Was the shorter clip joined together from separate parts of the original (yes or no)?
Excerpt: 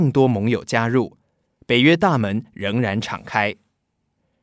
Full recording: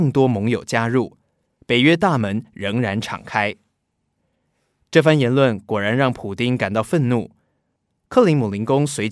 no